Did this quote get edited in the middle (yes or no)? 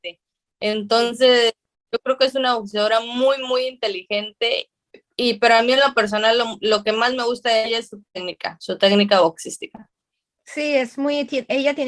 no